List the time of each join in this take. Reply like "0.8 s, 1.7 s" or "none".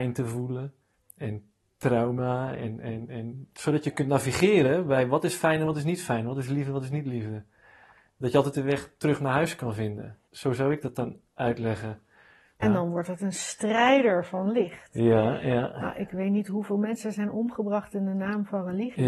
10.3 s, 12.6 s